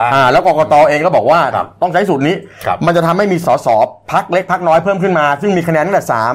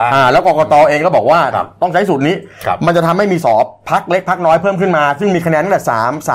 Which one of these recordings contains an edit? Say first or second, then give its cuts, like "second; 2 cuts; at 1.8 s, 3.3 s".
second; 1 cut; at 3.4 s